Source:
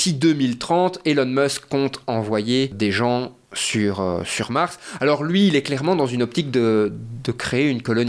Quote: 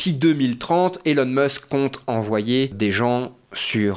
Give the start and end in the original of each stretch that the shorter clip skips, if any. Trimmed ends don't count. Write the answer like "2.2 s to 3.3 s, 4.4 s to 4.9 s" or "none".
none